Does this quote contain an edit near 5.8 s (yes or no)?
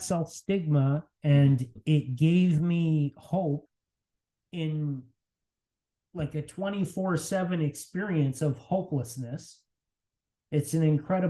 no